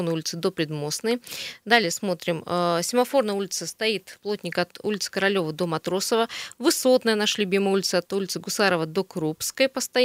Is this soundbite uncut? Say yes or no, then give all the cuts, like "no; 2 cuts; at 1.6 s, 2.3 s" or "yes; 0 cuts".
yes; 0 cuts